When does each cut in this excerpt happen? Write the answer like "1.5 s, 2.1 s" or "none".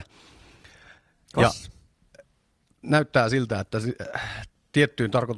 none